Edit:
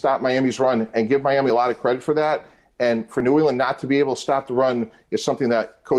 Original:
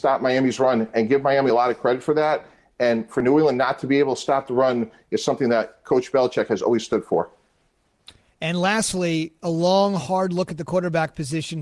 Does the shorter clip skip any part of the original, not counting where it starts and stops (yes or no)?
no